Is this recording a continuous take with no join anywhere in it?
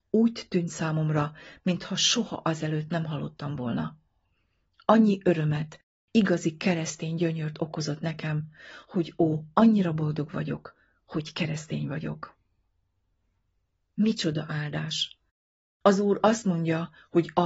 yes; 0 cuts

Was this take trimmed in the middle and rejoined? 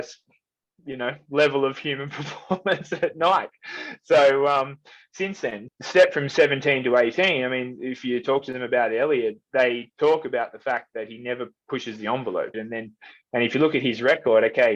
yes; 2 cuts; at 5.7 s, 12.5 s

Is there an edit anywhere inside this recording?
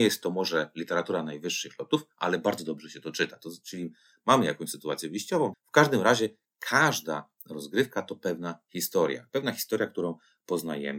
yes; 1 cut; at 5.5 s

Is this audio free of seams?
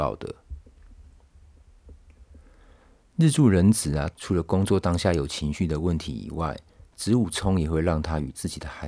no; 1 cut; at 4.1 s

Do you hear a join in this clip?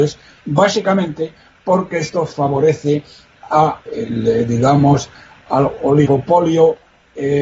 yes; 1 cut; at 3.9 s

